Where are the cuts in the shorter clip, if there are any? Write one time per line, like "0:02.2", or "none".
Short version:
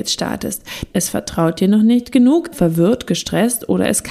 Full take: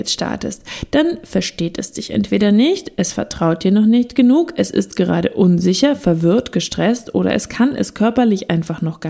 0:00.9
0:02.5